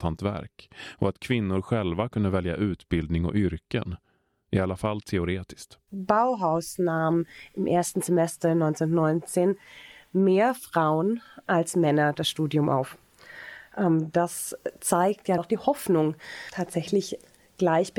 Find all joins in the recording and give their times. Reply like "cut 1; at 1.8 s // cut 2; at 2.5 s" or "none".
cut 1; at 15.4 s